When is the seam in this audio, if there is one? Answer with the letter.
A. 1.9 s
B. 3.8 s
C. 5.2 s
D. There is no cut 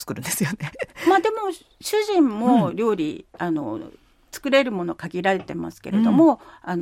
D